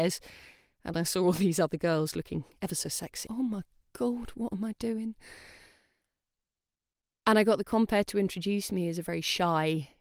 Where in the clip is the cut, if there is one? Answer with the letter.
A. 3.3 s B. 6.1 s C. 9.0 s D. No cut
A